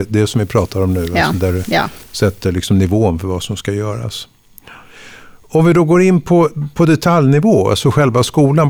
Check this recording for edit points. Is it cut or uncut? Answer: uncut